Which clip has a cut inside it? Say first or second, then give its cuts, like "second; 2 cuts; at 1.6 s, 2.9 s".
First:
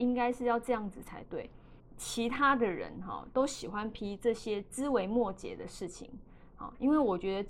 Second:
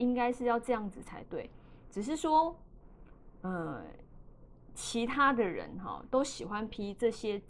first; 1 cut; at 1.8 s